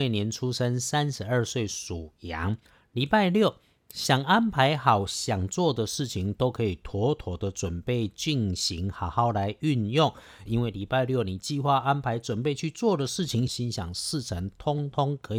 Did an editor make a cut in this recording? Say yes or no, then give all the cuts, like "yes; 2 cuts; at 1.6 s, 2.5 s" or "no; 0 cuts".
yes; 2 cuts; at 10.5 s, 13.5 s